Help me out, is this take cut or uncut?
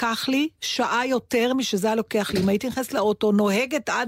uncut